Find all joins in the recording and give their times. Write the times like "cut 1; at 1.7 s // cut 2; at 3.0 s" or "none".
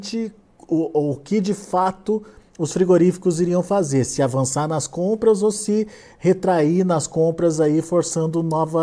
none